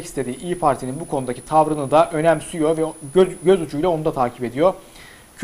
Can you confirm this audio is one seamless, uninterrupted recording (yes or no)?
yes